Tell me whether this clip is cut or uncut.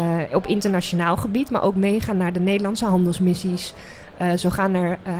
uncut